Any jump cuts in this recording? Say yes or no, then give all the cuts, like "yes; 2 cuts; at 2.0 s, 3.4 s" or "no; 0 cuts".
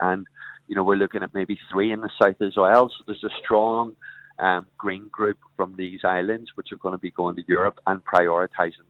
no; 0 cuts